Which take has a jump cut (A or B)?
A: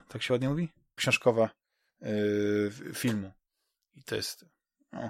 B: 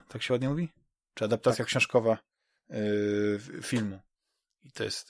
A